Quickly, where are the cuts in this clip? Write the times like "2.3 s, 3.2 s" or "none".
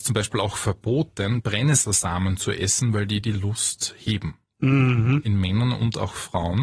none